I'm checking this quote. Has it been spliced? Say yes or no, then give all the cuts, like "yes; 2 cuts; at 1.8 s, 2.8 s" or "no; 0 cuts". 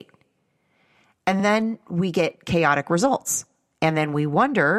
no; 0 cuts